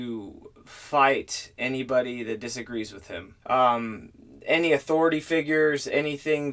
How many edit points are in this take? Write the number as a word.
one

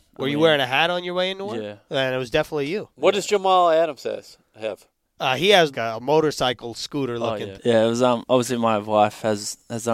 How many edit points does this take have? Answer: two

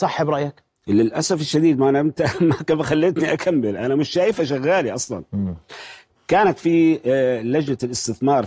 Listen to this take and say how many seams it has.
zero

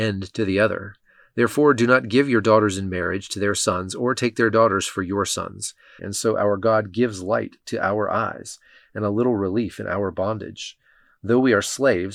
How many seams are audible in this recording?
one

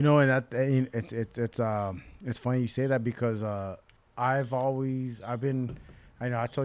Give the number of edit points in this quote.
zero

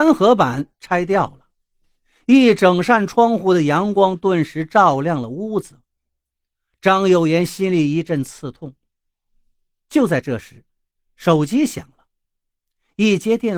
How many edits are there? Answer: zero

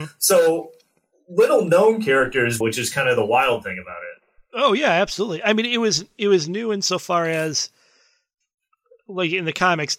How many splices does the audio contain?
one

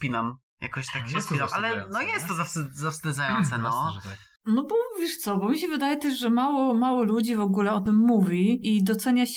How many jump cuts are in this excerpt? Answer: one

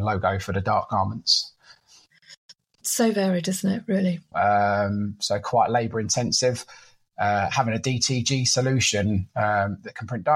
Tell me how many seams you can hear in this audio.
one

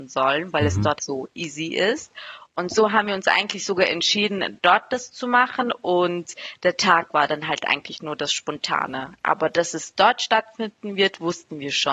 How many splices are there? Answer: one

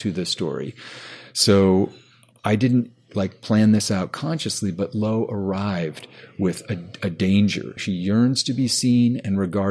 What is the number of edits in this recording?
one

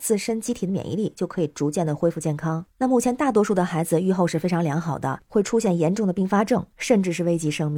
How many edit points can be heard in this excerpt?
two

